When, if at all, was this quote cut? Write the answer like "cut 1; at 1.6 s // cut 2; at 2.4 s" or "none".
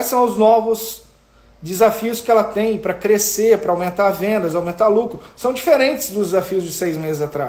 none